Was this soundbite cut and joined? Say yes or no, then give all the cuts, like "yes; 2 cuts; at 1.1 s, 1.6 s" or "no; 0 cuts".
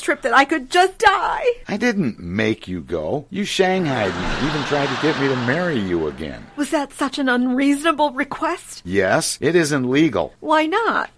no; 0 cuts